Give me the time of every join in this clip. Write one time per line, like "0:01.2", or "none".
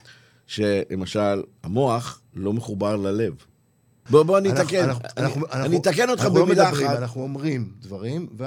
0:04.1